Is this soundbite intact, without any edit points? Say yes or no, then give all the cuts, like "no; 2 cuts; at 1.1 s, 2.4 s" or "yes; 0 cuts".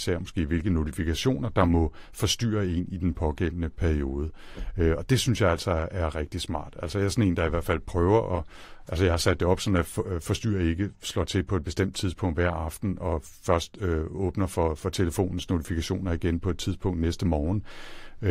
yes; 0 cuts